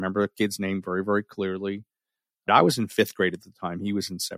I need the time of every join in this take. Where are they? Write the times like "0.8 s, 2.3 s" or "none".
2.5 s